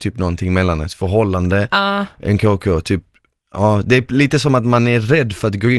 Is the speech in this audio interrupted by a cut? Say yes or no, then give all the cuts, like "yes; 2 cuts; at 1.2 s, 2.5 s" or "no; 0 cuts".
no; 0 cuts